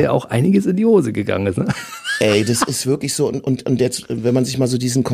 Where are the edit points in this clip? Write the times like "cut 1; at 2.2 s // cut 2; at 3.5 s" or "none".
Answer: none

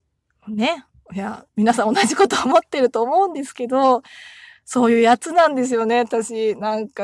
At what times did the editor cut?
none

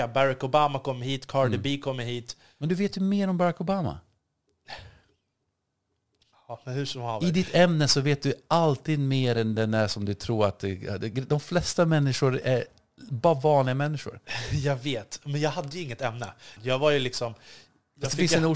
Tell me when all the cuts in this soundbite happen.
cut 1; at 16.6 s

